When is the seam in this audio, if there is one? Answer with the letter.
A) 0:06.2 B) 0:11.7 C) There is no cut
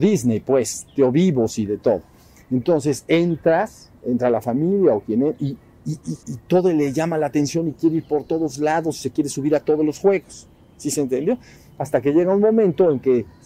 A